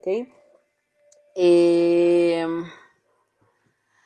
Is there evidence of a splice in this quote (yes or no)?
no